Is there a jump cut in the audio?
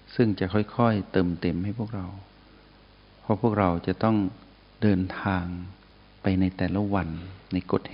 no; 0 cuts

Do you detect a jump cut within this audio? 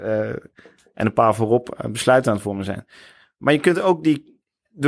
no; 0 cuts

